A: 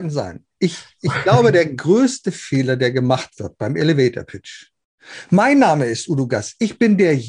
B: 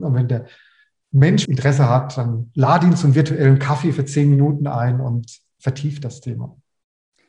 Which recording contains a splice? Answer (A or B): B